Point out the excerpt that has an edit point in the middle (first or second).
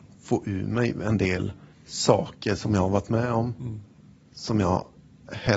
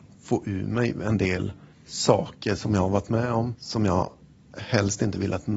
second